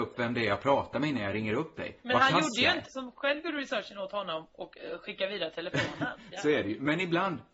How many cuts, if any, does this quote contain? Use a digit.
2